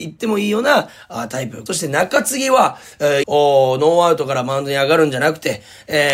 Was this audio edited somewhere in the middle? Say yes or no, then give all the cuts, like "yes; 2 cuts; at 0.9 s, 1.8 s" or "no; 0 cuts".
yes; 2 cuts; at 1.7 s, 3.2 s